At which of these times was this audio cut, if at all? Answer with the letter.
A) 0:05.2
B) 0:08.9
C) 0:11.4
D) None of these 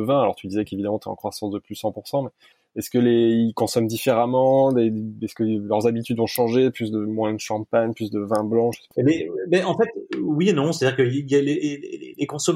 B